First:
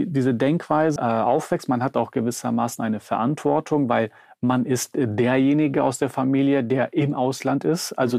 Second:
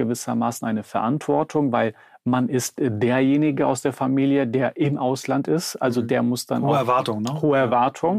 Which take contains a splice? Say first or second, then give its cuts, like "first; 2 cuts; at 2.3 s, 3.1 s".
first; 1 cut; at 1.0 s